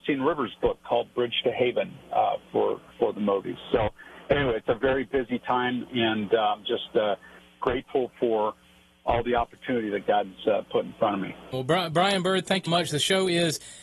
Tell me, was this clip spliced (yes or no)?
yes